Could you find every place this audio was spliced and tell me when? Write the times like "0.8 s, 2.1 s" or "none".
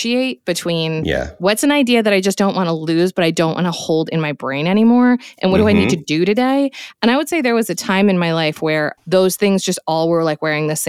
none

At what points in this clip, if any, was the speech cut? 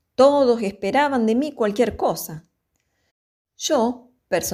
none

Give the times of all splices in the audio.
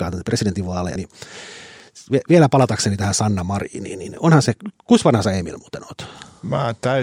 1.0 s

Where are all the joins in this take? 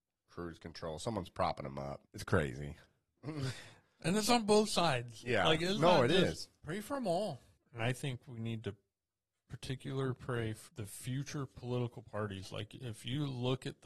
2.0 s, 6.6 s, 10.7 s

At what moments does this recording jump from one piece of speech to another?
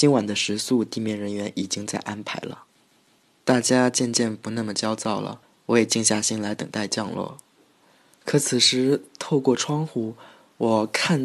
none

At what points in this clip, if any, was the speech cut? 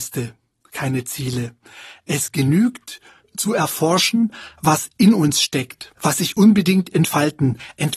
none

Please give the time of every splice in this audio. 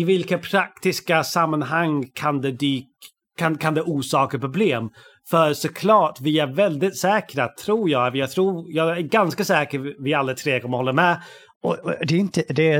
11.5 s

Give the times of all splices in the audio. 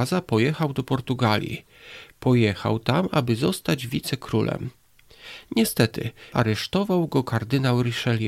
6.3 s

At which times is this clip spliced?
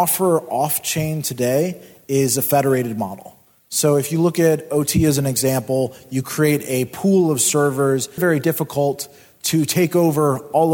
8.2 s

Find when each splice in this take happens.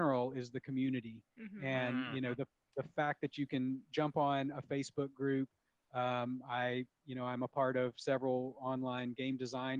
none

